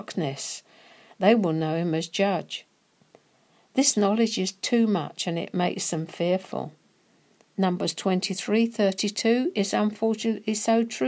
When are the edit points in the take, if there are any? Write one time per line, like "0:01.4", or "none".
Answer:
none